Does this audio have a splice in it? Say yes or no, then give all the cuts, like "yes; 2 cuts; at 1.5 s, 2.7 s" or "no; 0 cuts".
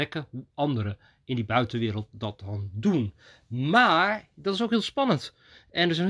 no; 0 cuts